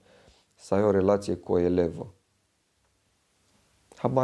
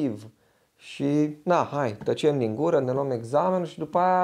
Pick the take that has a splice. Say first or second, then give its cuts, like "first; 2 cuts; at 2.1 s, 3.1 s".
second; 1 cut; at 2.8 s